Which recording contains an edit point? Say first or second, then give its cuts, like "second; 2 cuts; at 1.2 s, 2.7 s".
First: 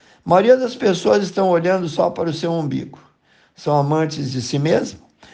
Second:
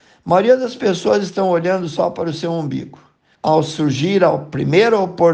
second; 1 cut; at 3.3 s